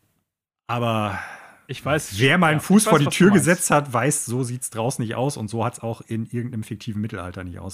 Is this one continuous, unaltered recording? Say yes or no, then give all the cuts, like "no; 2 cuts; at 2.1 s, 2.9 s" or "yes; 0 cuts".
yes; 0 cuts